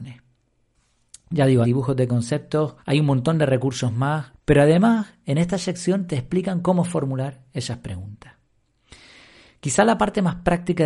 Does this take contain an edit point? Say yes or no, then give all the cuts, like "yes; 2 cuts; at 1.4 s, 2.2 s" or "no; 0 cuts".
yes; 3 cuts; at 1.6 s, 2.8 s, 4.3 s